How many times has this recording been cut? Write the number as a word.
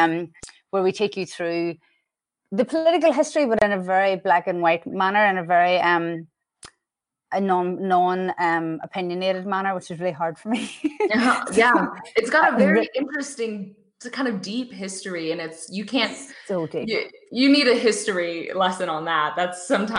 zero